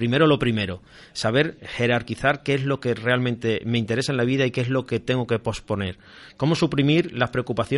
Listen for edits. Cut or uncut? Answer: cut